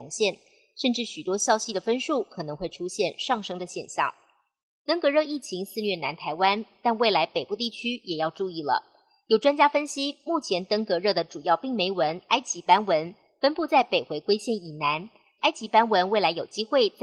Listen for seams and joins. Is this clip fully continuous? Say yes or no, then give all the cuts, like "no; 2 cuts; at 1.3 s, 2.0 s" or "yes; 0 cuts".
no; 1 cut; at 15.4 s